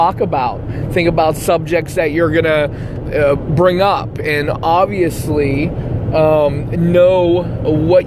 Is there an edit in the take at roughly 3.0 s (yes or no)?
yes